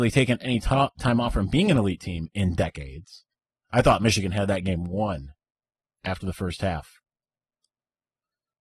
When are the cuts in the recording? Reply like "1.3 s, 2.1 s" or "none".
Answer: 3.6 s